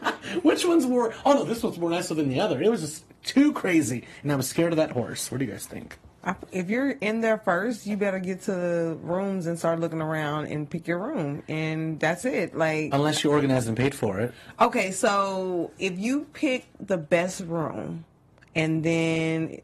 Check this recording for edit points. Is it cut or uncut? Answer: cut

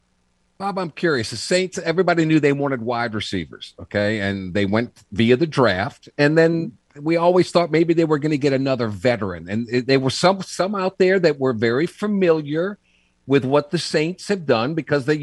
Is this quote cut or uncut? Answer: uncut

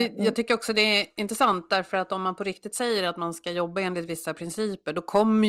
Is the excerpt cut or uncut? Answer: uncut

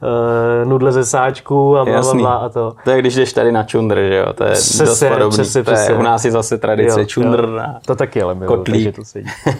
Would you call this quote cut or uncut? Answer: uncut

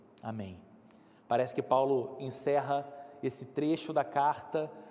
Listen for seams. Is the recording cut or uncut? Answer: uncut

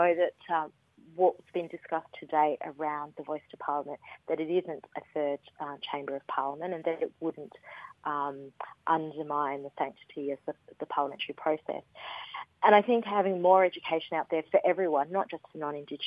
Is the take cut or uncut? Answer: uncut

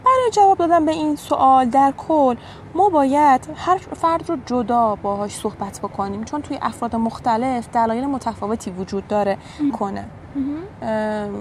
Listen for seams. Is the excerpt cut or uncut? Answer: cut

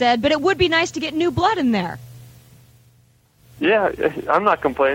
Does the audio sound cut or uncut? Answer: uncut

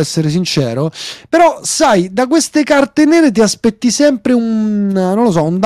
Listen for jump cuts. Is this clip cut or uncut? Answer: uncut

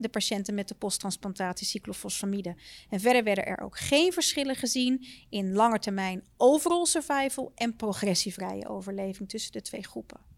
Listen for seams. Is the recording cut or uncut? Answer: uncut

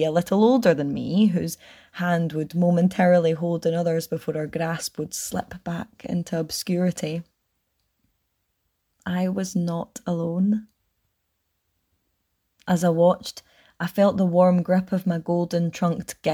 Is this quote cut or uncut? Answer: uncut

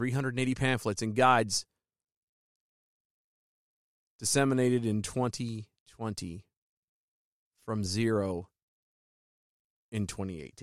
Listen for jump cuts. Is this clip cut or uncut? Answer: uncut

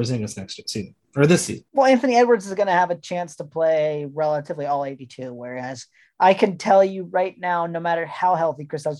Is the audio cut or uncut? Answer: cut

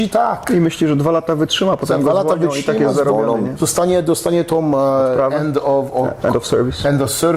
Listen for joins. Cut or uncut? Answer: uncut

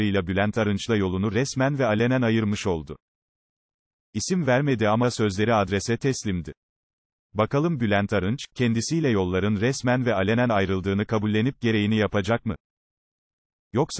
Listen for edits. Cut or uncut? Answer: uncut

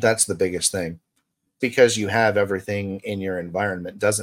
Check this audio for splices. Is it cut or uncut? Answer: cut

